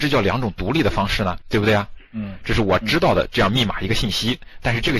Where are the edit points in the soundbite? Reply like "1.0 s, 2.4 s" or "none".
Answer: 1.4 s